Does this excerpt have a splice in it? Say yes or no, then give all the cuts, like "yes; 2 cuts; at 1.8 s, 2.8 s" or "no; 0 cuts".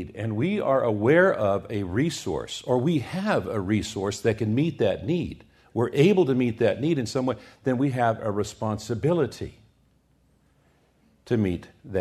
no; 0 cuts